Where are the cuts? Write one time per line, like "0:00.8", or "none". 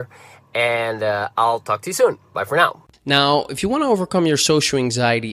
0:02.9